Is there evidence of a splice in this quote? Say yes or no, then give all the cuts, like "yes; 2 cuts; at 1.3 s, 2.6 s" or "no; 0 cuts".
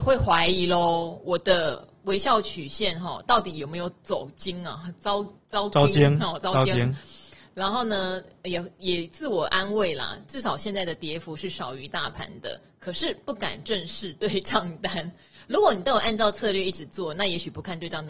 no; 0 cuts